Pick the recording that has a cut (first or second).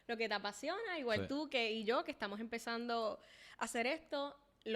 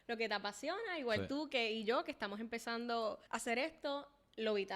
second